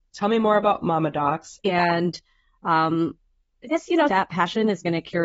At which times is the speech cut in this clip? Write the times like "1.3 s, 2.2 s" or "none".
1.6 s, 4.1 s